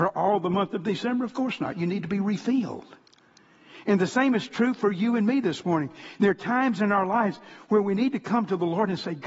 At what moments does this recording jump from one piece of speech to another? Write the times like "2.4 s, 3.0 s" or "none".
none